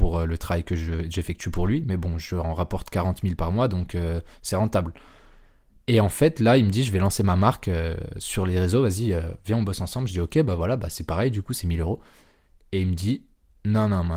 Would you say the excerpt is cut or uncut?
uncut